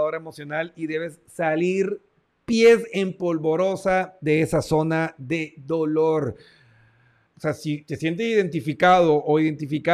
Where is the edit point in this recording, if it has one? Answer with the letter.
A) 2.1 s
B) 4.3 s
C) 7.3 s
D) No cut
C